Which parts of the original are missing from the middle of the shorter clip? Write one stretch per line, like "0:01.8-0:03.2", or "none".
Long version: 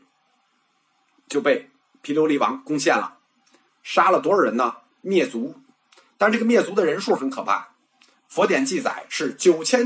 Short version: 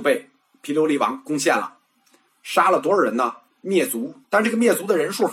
0:05.6-0:06.1

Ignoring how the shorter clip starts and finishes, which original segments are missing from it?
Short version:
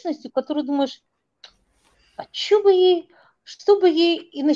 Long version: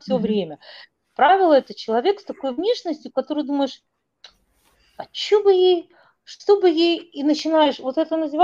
none

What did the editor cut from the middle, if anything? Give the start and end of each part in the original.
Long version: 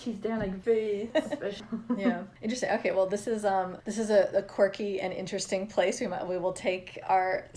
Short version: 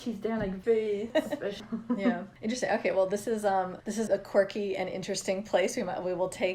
0:04.1-0:04.3

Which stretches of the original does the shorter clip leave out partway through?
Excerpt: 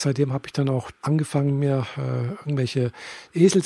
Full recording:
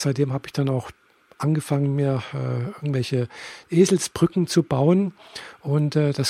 0:01.0-0:01.3

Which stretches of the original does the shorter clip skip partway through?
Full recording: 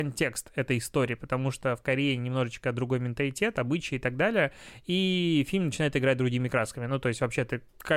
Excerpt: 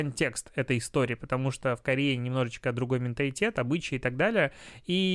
none

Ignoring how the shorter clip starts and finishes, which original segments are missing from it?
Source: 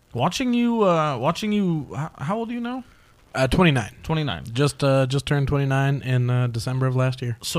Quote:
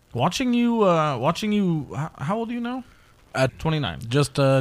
0:03.5-0:03.9

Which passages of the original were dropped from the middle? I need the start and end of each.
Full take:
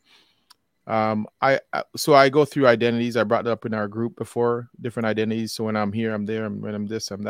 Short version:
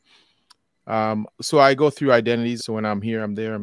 0:01.3-0:01.9
0:03.1-0:05.5

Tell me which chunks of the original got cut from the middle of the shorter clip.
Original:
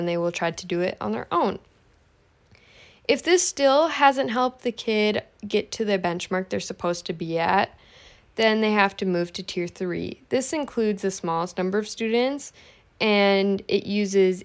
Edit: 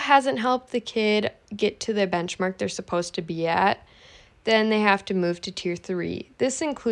none

